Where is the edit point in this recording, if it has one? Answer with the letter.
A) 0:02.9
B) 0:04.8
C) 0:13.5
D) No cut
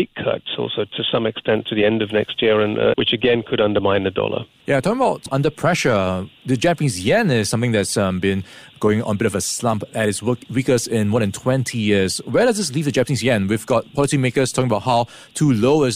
A